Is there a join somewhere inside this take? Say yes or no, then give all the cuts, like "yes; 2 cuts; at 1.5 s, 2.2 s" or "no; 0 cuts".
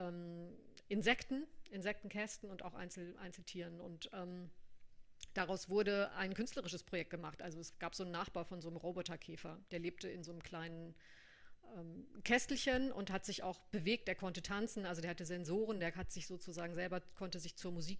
no; 0 cuts